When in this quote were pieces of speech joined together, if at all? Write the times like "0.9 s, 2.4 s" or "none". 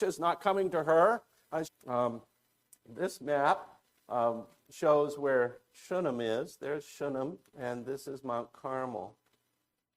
1.6 s, 7.5 s